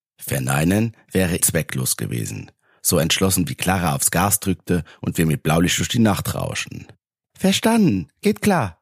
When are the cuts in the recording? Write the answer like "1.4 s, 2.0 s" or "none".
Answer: 1.4 s, 7.2 s